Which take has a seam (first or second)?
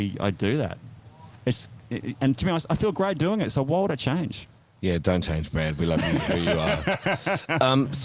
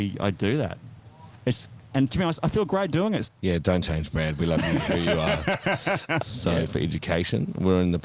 second